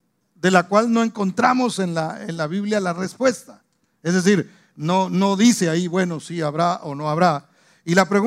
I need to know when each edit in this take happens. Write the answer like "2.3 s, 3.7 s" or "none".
none